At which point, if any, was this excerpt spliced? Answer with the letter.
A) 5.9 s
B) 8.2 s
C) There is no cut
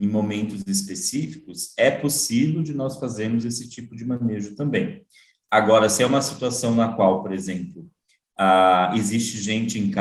C